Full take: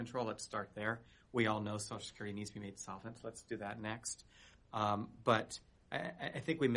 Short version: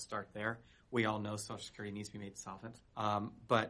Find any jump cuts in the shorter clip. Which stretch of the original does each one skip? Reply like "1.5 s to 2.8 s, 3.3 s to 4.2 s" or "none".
3.2 s to 4.5 s